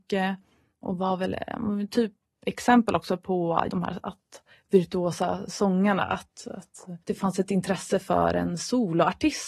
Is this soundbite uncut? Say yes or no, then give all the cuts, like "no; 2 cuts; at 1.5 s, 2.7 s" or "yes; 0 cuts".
no; 2 cuts; at 3.7 s, 7.0 s